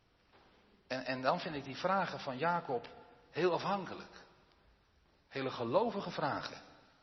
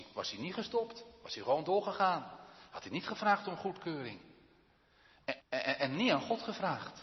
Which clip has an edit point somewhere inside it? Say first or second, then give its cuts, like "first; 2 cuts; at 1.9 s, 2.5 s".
second; 1 cut; at 5.4 s